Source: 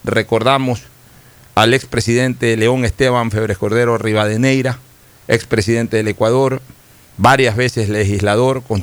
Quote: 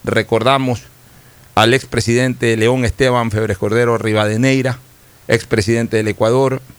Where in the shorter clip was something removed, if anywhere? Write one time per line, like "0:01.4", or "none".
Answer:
none